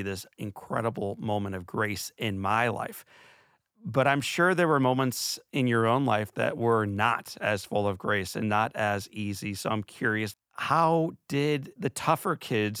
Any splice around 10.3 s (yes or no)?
yes